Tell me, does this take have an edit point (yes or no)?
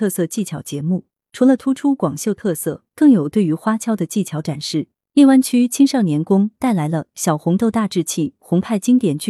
yes